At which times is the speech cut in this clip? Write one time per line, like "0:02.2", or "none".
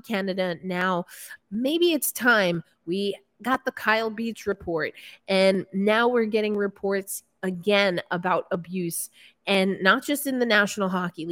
0:01.4